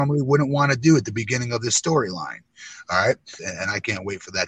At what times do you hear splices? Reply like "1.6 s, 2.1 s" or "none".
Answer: 3.4 s